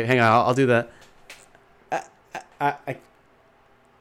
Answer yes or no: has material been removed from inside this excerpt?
yes